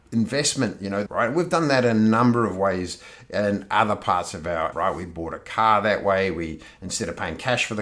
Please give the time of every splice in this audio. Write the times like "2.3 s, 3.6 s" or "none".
1.1 s, 4.7 s